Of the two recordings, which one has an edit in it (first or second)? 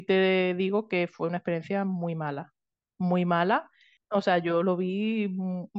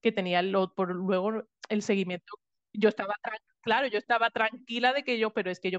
first